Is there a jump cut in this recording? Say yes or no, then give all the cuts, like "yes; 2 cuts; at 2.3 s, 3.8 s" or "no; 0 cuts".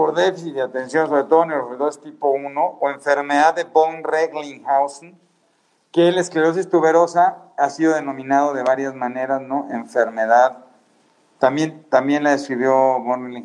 no; 0 cuts